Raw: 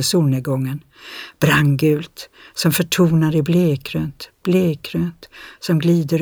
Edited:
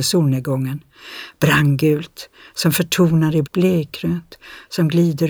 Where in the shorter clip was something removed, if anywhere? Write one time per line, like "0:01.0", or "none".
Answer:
0:03.4